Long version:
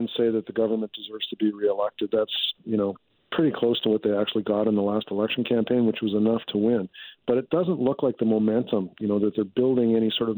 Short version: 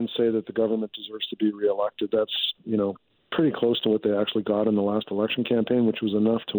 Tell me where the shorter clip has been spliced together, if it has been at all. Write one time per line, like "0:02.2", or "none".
none